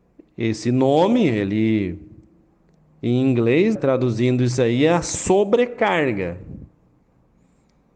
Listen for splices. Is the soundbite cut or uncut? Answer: cut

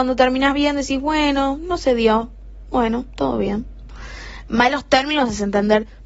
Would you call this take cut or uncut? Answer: uncut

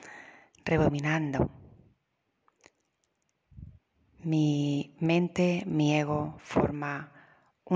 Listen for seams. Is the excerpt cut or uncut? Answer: uncut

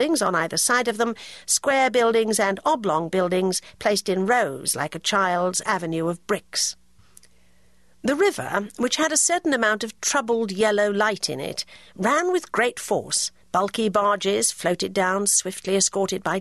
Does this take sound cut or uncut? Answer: cut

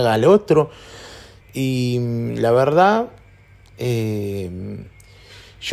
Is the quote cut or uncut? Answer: cut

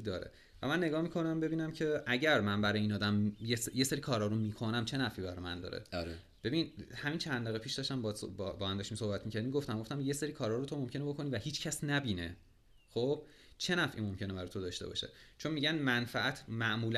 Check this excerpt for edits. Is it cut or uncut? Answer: uncut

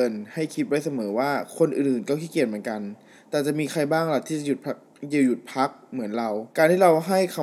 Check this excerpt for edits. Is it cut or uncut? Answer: cut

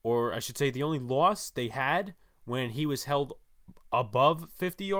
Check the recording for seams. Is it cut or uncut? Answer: uncut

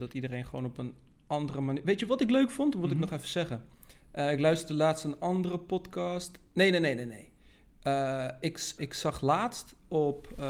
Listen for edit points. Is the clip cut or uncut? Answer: cut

